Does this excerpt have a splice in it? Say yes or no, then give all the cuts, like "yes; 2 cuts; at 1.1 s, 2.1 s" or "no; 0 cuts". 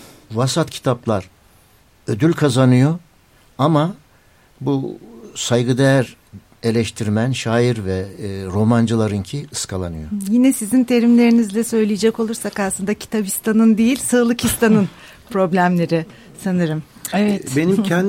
no; 0 cuts